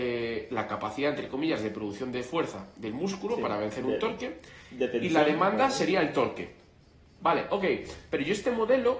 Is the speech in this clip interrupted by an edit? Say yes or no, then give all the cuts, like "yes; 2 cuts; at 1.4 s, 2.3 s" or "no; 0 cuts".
yes; 1 cut; at 7.2 s